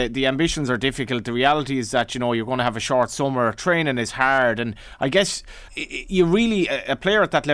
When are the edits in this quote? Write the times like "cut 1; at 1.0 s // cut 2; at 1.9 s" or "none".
cut 1; at 5.7 s